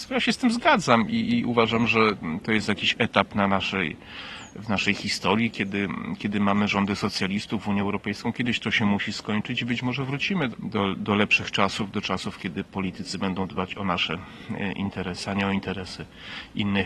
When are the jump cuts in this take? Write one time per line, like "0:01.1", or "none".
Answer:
0:10.5